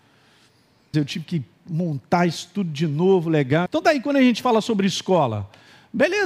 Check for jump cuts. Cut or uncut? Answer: cut